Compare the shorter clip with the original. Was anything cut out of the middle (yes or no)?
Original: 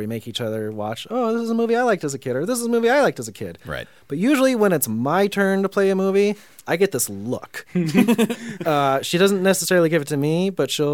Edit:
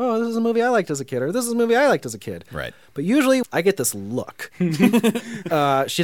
yes